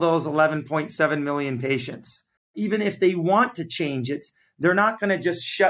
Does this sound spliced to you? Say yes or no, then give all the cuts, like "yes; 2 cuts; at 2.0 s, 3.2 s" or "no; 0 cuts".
yes; 1 cut; at 2.4 s